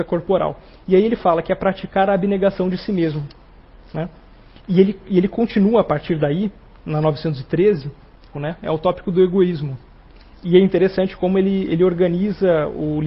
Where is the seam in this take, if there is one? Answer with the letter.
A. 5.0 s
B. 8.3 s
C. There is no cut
B